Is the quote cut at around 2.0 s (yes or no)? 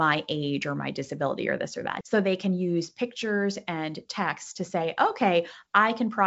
yes